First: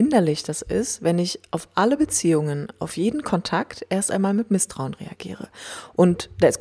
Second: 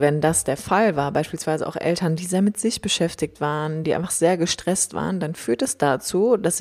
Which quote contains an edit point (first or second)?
second